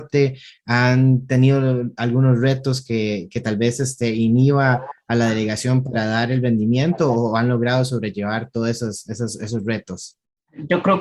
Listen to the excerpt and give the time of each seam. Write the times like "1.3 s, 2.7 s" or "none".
none